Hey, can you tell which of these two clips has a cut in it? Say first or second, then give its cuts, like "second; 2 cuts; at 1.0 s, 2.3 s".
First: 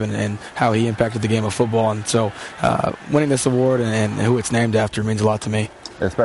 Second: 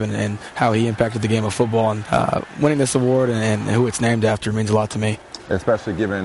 second; 1 cut; at 2.0 s